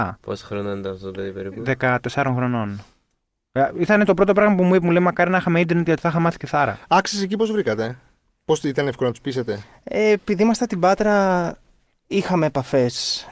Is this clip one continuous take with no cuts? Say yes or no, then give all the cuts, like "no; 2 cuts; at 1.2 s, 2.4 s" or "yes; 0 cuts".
yes; 0 cuts